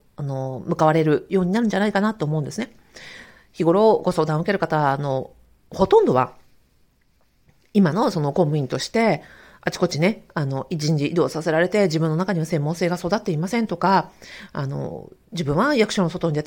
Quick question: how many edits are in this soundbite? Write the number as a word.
zero